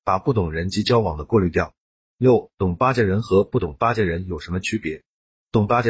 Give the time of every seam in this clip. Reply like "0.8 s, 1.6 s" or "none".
none